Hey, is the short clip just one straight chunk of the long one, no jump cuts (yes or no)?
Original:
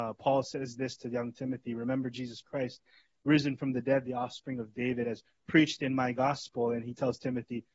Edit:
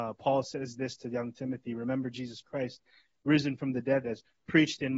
no